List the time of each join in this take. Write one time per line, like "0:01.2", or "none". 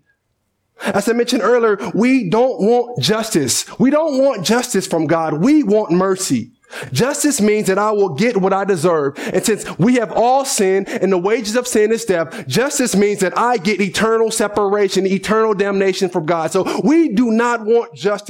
none